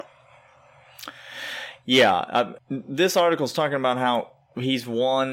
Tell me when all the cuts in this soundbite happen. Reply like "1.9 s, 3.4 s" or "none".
2.6 s

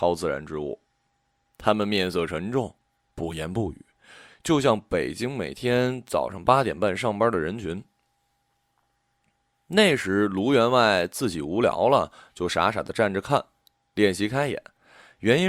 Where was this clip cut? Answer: 1.5 s

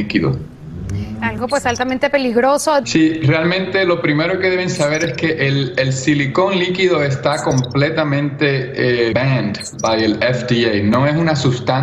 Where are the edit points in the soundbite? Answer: 2.8 s, 9.1 s

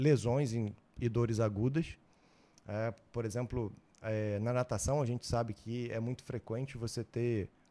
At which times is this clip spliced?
none

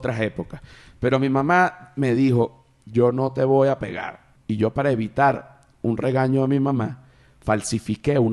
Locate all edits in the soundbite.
4.3 s

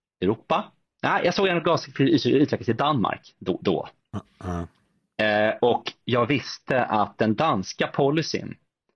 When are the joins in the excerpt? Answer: none

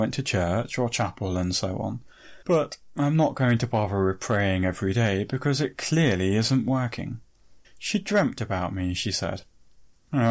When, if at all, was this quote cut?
2.4 s, 7.6 s

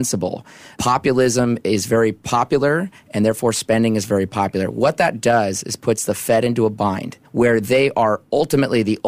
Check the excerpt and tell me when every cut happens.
7.2 s

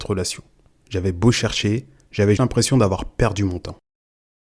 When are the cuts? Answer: 2.4 s

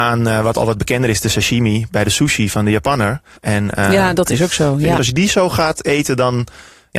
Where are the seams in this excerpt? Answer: 3.4 s, 5.0 s

